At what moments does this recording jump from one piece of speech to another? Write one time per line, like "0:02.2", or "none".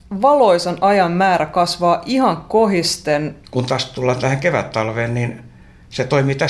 0:03.4

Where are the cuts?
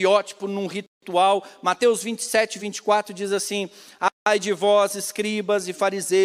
0:02.6

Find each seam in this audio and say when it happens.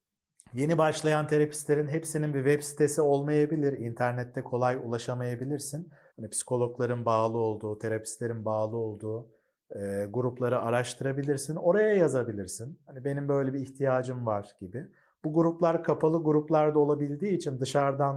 0:06.1

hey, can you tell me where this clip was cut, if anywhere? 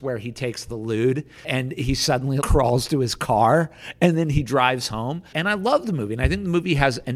0:02.4
0:05.3

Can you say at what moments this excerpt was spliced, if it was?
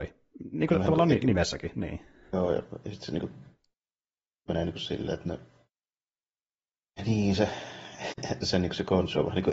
none

